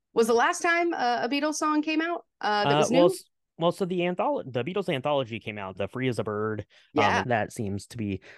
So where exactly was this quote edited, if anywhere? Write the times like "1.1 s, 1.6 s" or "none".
2.3 s, 5.7 s, 7.2 s

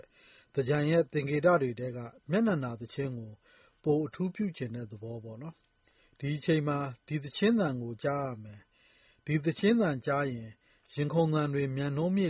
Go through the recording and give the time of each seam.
none

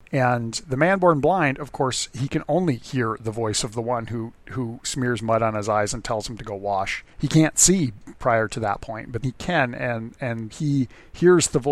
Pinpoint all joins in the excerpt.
9.2 s, 10.5 s

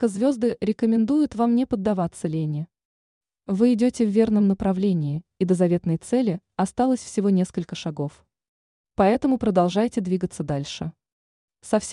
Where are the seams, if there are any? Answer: 3.3 s

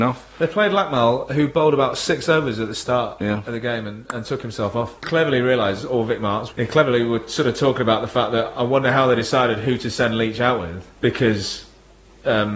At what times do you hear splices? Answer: 5.0 s, 6.5 s, 11.0 s

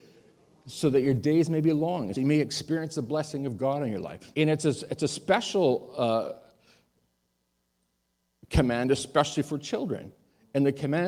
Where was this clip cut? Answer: 2.1 s, 4.3 s

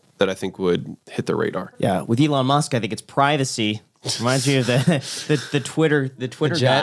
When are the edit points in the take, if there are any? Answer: none

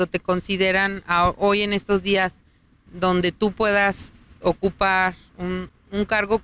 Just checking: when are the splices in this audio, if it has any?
none

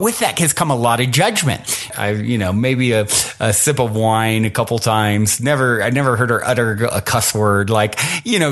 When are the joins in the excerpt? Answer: 1.9 s

